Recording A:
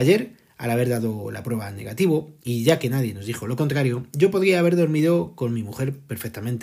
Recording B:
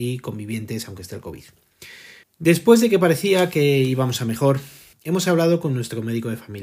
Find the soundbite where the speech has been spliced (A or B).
B